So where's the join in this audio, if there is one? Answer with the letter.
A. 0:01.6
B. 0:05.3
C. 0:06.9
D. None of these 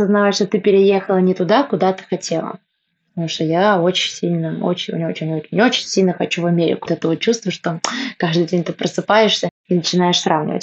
C